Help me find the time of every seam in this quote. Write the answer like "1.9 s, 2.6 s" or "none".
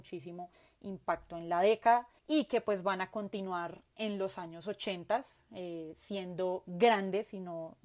2.2 s